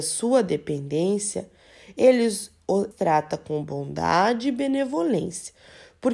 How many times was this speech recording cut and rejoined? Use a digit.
1